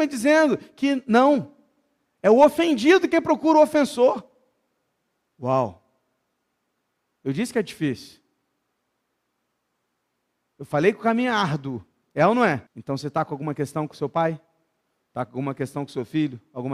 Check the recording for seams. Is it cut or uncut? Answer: cut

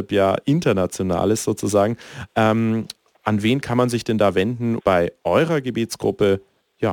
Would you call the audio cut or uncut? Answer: cut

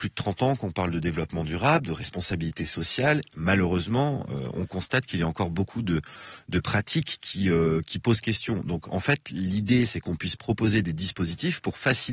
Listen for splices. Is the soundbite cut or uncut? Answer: uncut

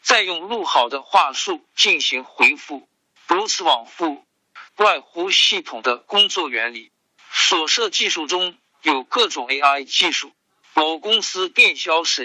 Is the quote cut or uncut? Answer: cut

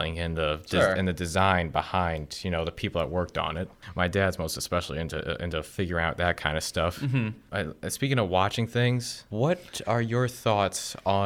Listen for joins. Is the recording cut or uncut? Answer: uncut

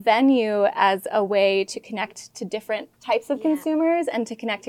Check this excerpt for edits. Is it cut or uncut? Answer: cut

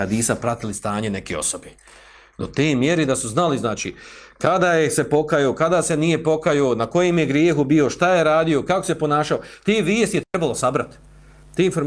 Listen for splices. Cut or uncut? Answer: uncut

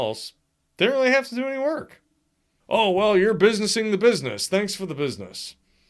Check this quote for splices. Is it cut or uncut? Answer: cut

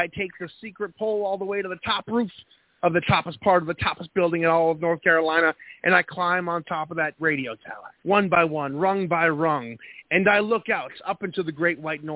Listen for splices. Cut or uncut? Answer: cut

